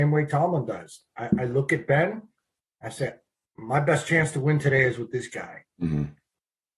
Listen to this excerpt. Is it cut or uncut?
uncut